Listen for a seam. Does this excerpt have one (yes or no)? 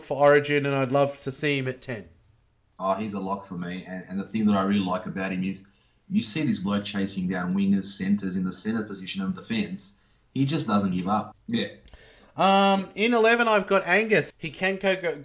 yes